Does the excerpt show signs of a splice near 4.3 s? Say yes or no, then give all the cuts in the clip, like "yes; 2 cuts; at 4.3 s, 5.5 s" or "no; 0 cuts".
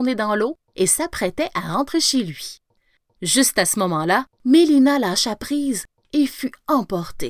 yes; 1 cut; at 4.3 s